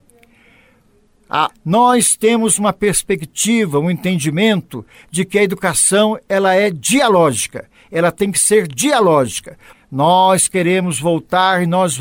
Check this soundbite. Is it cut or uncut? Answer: cut